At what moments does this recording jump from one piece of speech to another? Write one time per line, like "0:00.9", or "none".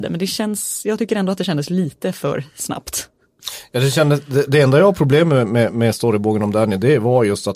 0:04.5